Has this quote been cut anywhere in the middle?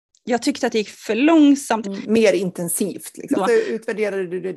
yes; 2 cuts; at 1.8 s, 3.3 s

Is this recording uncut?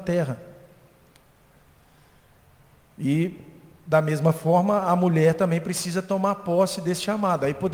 yes; 0 cuts

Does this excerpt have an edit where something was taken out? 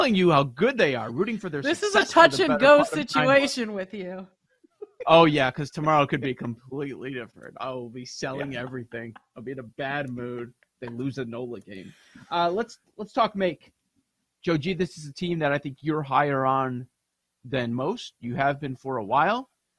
no; 0 cuts

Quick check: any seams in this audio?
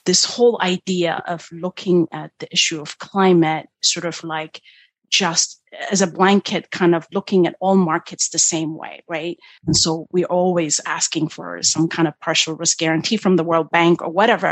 yes; 1 cut; at 9.6 s

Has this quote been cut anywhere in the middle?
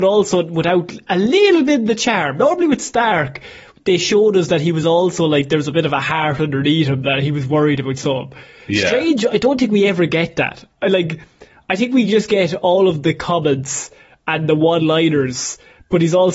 no; 0 cuts

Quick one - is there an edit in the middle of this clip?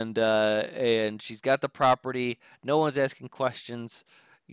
no; 0 cuts

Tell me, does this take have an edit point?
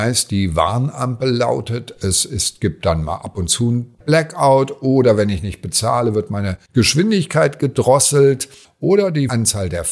no; 0 cuts

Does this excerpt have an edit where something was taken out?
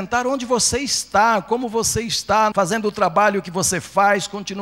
yes; 1 cut; at 2.5 s

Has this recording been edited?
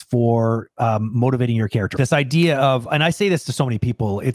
yes; 1 cut; at 1.9 s

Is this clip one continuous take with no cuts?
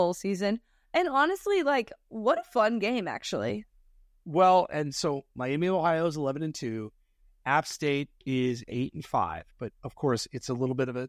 yes; 0 cuts

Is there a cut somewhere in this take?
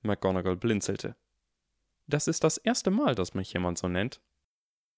no; 0 cuts

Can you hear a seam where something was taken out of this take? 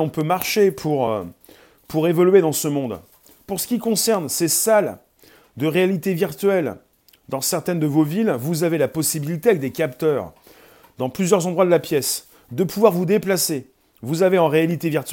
no; 0 cuts

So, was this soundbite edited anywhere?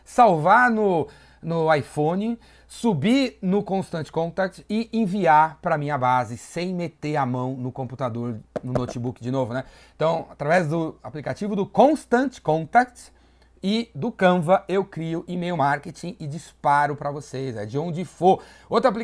no; 0 cuts

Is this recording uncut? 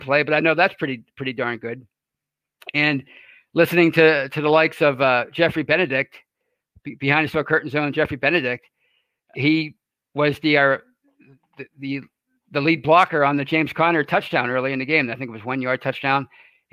no; 1 cut; at 9.3 s

